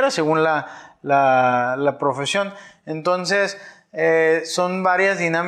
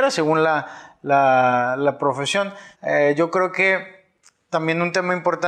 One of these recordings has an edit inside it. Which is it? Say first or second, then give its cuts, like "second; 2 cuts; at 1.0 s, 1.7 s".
second; 1 cut; at 2.7 s